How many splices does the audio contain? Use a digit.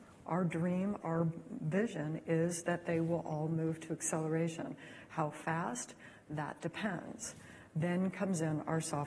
1